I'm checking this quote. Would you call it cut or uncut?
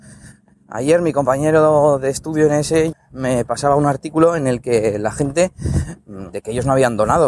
cut